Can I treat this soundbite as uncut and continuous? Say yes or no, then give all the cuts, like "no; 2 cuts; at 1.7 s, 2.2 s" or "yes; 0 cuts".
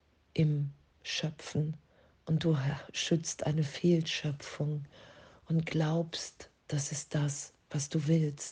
yes; 0 cuts